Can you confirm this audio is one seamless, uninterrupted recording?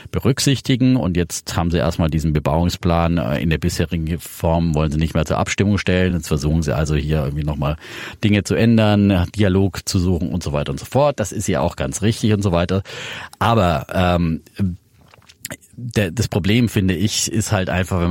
yes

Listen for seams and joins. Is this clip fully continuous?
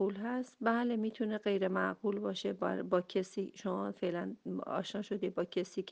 yes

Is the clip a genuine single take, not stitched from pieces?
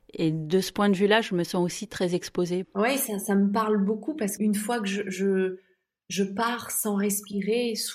no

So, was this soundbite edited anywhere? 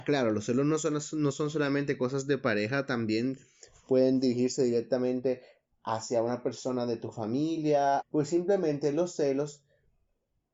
yes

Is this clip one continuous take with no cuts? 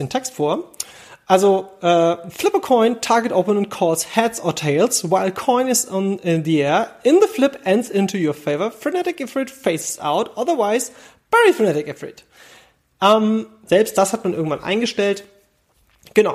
no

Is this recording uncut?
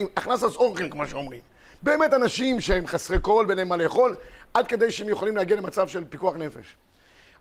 yes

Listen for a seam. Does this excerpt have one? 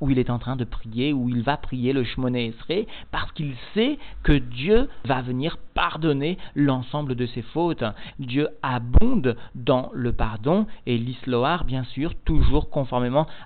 yes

